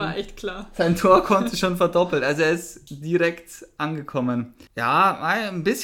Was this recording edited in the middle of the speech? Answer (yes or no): yes